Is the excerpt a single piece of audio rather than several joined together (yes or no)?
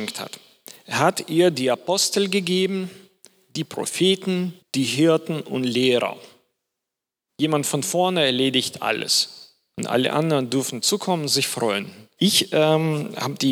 no